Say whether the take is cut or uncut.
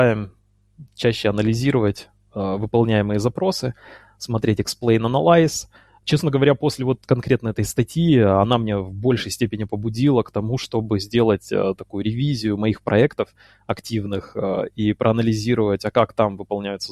uncut